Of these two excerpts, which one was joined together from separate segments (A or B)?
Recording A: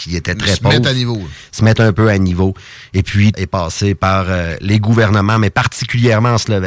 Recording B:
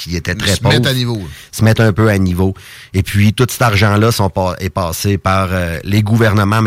A